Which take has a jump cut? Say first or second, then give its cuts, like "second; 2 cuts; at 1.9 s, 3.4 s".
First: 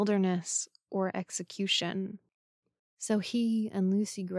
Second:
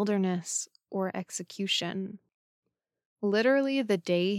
first; 1 cut; at 2.8 s